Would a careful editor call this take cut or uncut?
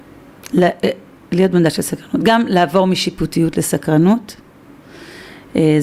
uncut